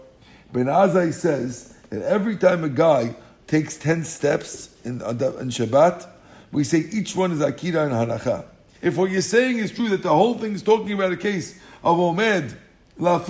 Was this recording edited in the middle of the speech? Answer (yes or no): yes